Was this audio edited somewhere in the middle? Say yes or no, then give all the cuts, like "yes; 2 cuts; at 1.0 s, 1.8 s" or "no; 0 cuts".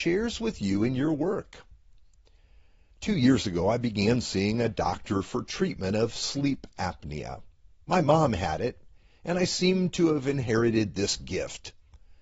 no; 0 cuts